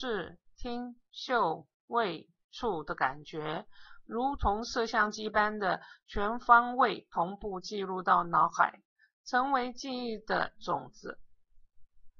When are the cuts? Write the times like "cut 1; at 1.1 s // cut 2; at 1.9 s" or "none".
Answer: none